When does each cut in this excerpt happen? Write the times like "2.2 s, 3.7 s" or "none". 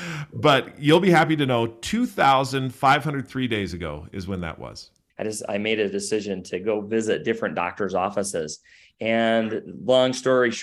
5.1 s